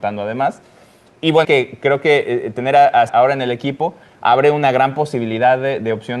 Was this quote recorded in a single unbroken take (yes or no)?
no